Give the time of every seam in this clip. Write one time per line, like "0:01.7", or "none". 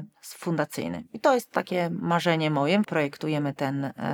0:02.8